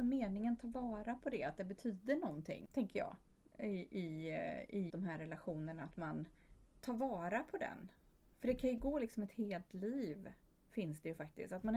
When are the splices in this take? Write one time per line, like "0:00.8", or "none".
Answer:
0:04.9